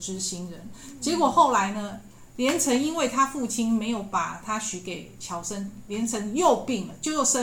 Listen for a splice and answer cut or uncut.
uncut